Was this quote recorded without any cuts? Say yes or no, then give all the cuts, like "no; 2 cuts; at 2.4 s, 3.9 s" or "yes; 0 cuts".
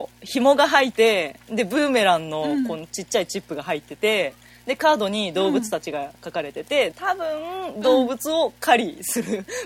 no; 2 cuts; at 0.9 s, 6.9 s